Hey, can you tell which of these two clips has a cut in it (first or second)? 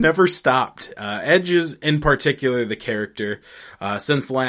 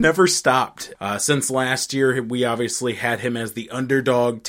second